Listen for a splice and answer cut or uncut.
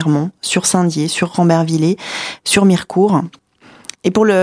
uncut